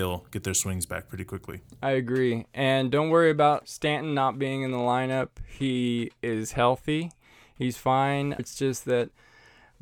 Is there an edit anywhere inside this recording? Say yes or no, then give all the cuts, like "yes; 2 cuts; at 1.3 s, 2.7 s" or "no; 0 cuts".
yes; 1 cut; at 8.4 s